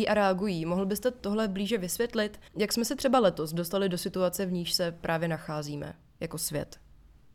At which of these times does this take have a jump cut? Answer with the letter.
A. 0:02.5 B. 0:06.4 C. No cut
A